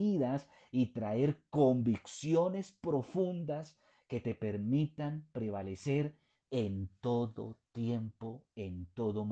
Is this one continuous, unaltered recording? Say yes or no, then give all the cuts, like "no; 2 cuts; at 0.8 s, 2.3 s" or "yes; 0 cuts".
yes; 0 cuts